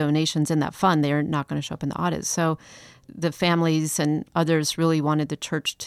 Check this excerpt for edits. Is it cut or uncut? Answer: uncut